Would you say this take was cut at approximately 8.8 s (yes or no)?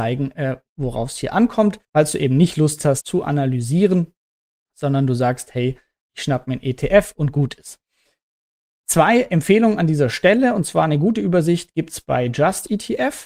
no